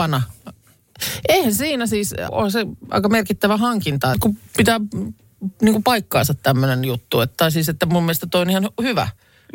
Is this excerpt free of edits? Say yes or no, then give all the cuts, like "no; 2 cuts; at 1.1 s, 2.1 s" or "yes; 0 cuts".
no; 2 cuts; at 2.3 s, 4.1 s